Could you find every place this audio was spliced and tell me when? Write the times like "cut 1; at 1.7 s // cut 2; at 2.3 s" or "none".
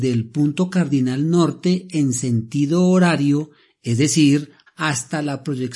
cut 1; at 4.7 s

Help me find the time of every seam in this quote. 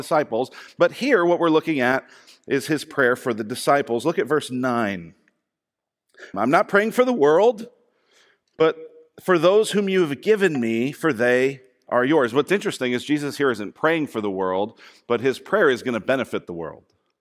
cut 1; at 6.3 s

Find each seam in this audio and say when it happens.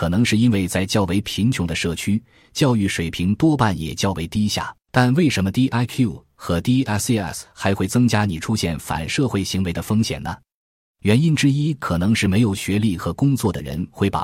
cut 1; at 4.8 s

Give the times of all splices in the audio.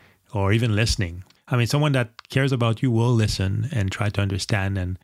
cut 1; at 1.4 s

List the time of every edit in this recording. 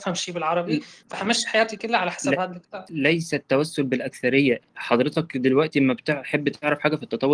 cut 1; at 4.6 s

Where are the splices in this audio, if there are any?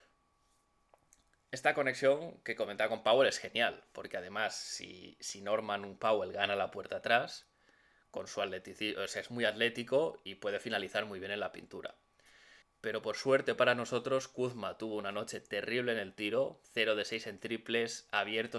cut 1; at 12.6 s // cut 2; at 16.6 s

